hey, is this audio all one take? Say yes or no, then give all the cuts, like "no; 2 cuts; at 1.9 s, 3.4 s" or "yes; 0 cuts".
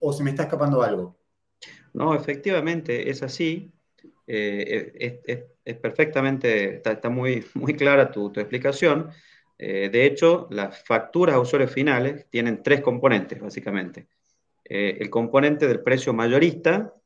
yes; 0 cuts